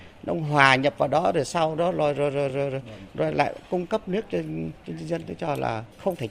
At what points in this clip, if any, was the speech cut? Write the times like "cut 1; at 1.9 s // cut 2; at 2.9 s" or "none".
none